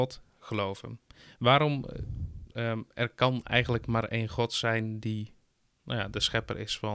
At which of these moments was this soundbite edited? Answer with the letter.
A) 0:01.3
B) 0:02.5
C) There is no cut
B